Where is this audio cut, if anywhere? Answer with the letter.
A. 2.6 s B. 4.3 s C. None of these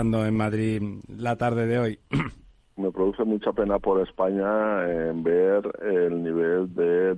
A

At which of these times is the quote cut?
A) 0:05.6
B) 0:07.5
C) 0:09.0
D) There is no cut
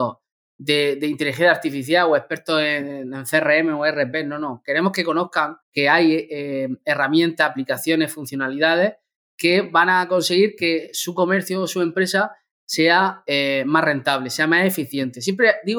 A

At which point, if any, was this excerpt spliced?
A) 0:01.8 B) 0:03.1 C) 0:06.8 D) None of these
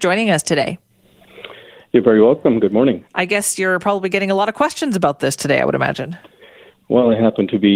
D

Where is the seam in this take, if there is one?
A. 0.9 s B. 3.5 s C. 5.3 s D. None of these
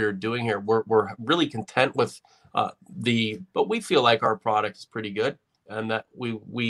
B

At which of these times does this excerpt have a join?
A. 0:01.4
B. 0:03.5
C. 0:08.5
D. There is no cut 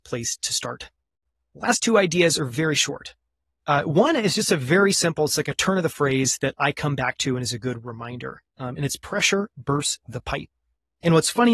D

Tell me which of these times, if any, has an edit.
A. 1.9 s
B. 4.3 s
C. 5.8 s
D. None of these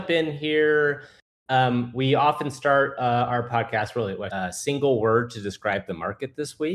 B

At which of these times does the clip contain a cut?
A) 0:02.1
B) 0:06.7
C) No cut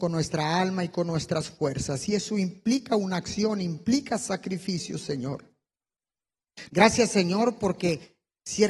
B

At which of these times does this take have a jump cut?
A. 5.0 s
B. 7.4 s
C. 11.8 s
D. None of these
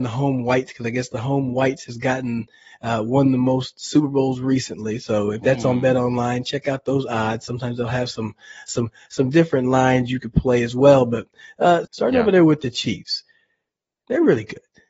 C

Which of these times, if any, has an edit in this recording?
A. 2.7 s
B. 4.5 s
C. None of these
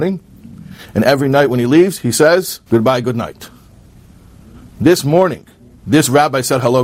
A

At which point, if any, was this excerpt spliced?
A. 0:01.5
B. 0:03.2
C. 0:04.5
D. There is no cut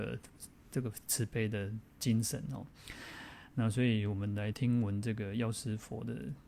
C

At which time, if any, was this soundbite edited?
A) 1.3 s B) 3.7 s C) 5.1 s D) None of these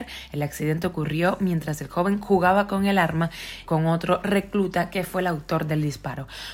B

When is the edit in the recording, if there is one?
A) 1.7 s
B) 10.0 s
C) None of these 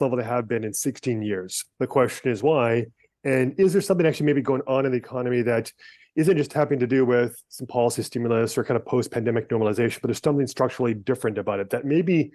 A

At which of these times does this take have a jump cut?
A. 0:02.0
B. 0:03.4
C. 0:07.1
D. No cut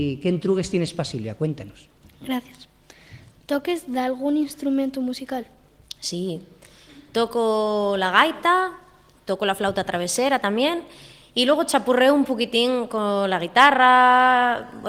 A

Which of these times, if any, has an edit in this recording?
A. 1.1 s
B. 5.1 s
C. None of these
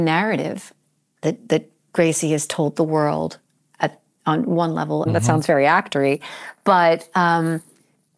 B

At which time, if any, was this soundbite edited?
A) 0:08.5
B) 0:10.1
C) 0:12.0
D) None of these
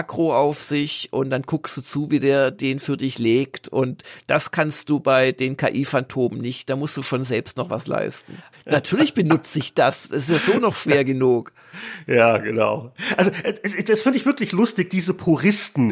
A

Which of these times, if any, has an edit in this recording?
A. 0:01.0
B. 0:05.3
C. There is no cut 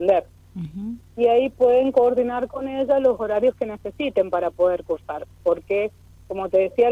A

